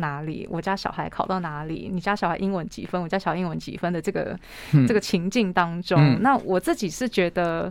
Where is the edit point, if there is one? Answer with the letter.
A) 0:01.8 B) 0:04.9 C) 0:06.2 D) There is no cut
D